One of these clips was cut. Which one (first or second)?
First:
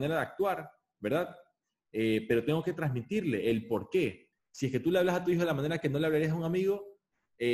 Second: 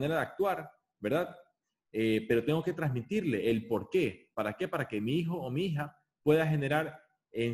first